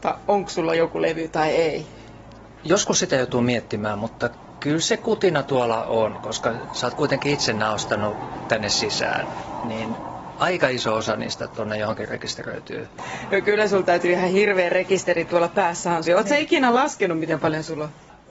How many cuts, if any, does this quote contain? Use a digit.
1